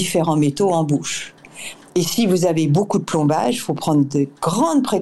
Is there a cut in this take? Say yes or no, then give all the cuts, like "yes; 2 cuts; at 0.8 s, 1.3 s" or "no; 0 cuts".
no; 0 cuts